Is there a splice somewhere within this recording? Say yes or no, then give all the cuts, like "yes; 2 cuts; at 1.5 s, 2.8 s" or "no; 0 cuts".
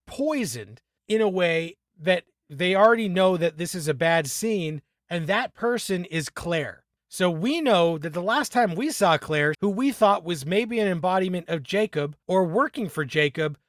yes; 1 cut; at 9.5 s